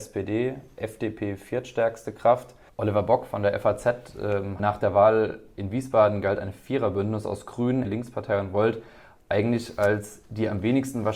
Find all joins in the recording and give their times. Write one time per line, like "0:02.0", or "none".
0:04.6
0:07.8